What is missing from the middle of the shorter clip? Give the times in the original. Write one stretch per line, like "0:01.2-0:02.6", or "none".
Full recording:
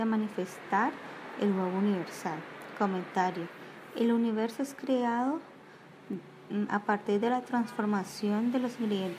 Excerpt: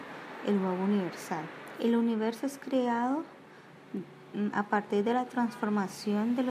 0:02.7-0:03.9